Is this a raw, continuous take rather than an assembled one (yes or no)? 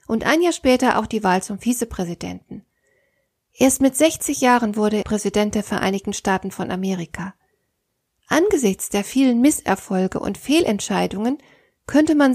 no